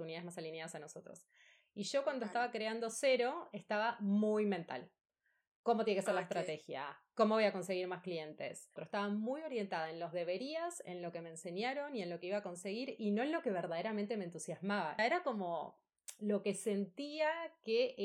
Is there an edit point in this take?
yes; 2 cuts; at 8.8 s, 15.0 s

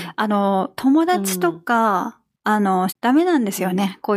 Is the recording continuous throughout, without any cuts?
no; 1 cut; at 2.9 s

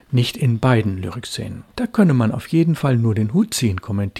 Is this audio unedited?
no; 1 cut; at 1.7 s

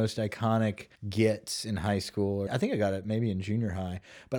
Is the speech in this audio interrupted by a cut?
yes; 2 cuts; at 1.0 s, 2.5 s

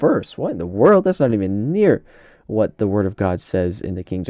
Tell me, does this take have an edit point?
no; 0 cuts

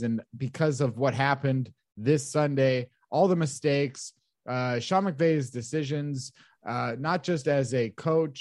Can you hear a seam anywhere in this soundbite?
no; 0 cuts

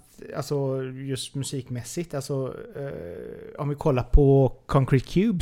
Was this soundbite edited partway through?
no; 0 cuts

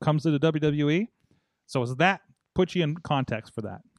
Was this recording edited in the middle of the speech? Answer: no; 0 cuts

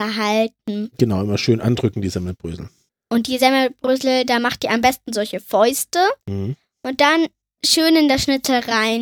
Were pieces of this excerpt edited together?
yes; 1 cut; at 6.2 s

